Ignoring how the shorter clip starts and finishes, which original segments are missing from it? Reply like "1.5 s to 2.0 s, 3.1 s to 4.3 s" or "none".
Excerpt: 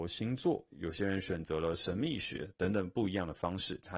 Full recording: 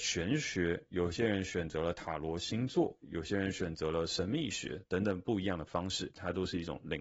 none